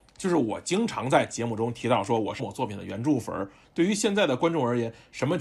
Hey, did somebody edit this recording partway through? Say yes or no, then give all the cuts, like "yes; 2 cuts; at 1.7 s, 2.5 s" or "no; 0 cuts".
yes; 2 cuts; at 2.4 s, 3.6 s